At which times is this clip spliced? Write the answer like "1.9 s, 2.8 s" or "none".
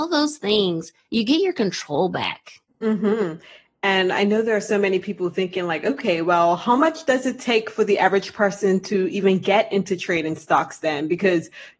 2.7 s